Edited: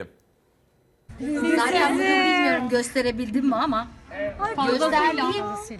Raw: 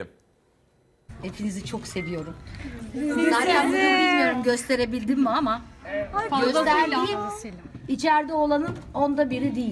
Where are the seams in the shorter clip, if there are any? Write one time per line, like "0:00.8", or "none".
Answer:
0:01.2